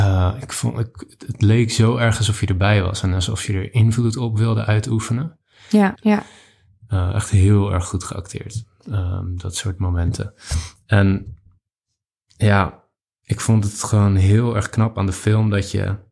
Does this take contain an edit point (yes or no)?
yes